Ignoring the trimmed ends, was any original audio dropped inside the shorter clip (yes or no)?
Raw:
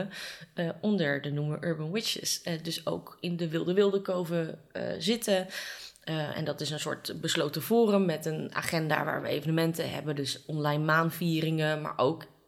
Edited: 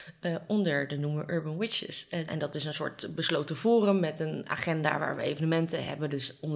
yes